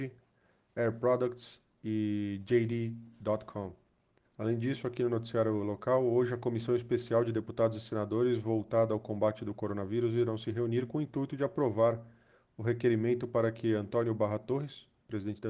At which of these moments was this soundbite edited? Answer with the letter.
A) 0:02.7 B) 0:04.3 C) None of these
B